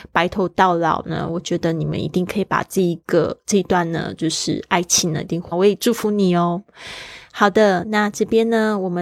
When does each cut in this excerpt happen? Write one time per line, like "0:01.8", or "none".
0:05.5